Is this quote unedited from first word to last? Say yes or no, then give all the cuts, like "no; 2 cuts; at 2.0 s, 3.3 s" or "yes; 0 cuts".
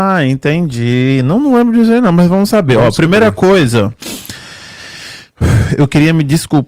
yes; 0 cuts